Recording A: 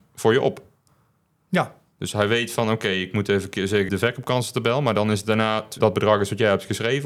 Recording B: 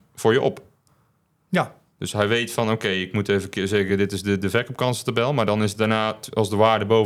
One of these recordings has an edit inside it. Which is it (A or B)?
A